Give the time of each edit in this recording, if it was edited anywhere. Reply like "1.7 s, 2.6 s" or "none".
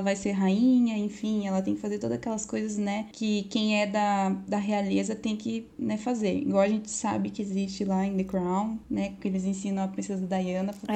none